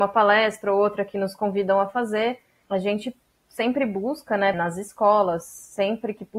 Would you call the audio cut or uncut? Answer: cut